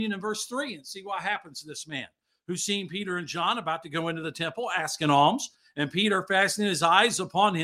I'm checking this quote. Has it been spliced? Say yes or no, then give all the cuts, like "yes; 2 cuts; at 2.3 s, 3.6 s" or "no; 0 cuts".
no; 0 cuts